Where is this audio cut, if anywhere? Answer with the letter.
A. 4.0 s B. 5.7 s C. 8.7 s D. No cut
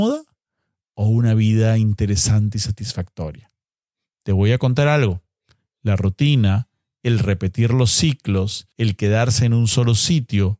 C